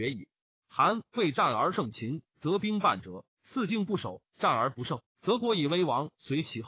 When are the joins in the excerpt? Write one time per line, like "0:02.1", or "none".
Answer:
none